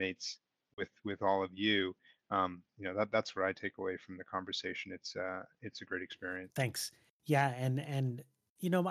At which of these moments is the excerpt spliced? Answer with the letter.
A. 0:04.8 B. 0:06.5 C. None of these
B